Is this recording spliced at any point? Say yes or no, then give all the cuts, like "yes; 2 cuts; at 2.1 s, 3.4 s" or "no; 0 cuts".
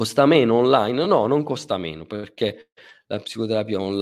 no; 0 cuts